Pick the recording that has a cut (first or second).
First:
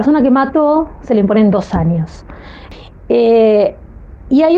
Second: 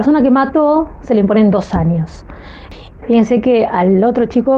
second